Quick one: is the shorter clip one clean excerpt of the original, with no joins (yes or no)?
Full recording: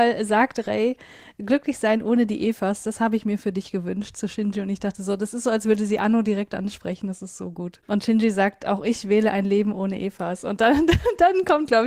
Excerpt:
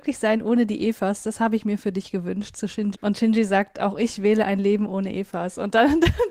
no